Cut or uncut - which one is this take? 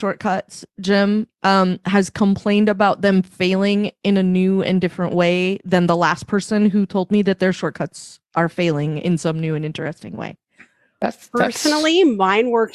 uncut